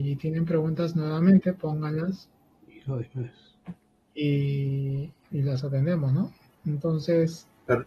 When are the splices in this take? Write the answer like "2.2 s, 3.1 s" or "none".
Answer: 5.3 s